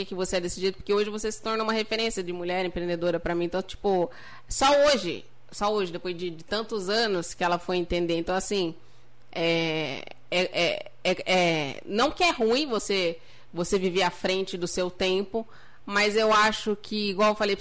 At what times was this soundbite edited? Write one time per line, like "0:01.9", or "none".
none